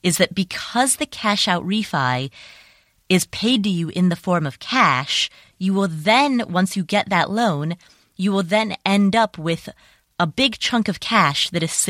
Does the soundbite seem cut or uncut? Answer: uncut